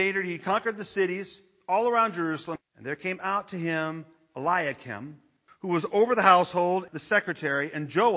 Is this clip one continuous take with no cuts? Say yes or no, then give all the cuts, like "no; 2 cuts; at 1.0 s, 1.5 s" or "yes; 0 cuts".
no; 3 cuts; at 2.6 s, 5.5 s, 6.9 s